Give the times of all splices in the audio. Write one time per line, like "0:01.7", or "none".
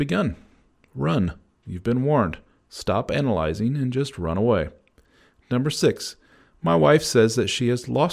none